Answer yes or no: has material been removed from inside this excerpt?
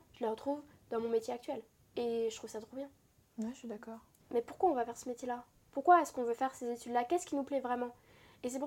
yes